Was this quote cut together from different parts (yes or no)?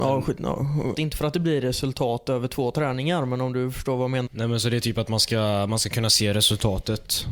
yes